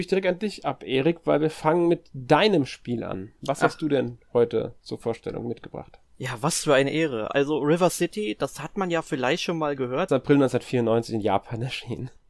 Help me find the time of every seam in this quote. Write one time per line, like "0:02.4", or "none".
0:07.3
0:10.1